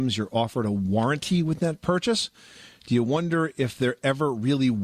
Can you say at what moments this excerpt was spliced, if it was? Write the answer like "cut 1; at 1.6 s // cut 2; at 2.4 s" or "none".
none